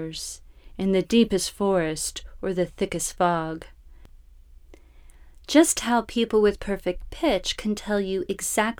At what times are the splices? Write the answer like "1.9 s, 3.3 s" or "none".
none